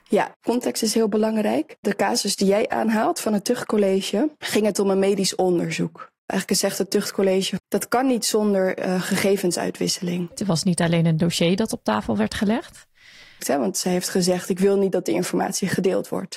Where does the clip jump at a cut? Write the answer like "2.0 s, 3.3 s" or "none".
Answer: 7.6 s, 10.3 s, 13.4 s